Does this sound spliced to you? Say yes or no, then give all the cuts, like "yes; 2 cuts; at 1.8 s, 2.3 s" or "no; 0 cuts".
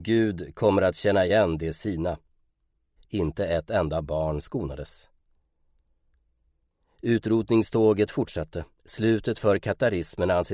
yes; 2 cuts; at 3.0 s, 8.7 s